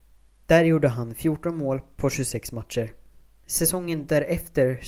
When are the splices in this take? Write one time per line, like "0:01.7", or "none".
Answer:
none